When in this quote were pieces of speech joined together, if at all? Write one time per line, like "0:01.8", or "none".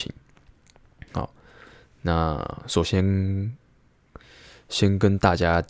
0:02.8